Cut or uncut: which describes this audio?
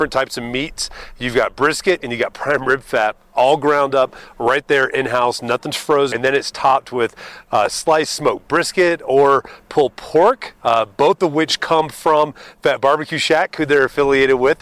cut